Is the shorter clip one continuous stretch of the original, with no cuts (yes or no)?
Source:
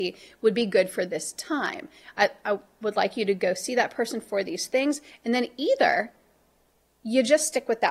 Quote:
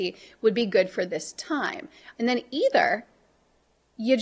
no